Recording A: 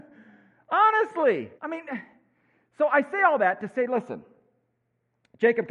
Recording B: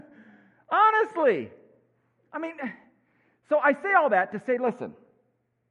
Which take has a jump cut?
A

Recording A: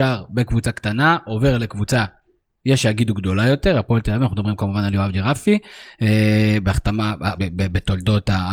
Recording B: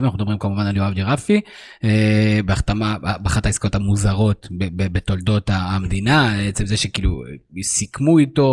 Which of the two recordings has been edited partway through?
A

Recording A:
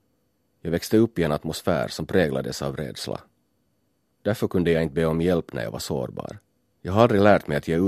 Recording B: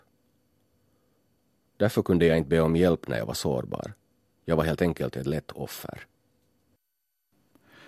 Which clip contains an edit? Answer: A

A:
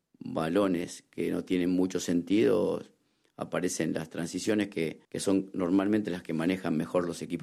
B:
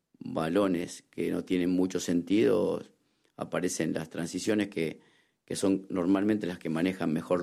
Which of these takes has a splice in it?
A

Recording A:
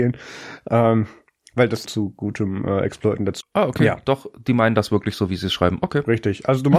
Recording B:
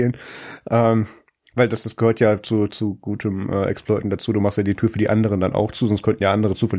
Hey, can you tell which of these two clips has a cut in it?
A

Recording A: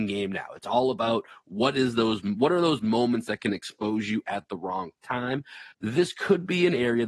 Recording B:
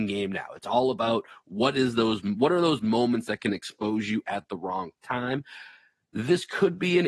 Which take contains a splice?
A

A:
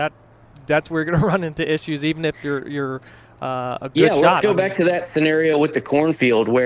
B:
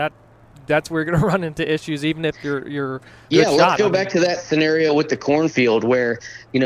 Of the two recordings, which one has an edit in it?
B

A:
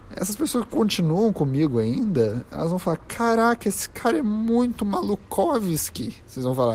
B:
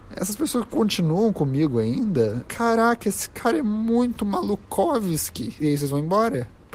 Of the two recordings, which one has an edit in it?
B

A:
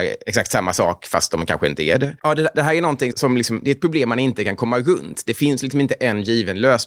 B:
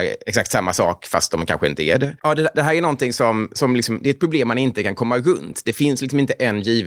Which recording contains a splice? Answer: A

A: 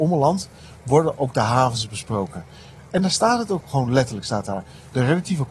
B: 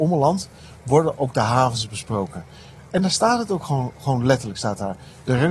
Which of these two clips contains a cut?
A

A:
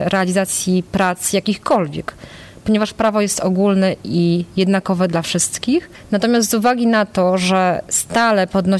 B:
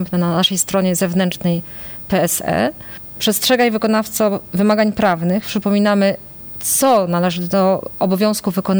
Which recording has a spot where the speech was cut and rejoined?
B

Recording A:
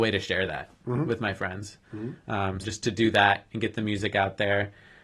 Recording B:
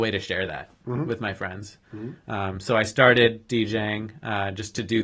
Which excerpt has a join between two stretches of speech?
A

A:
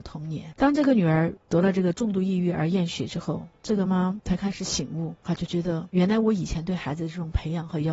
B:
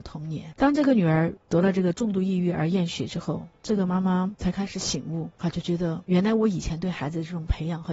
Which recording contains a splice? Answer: A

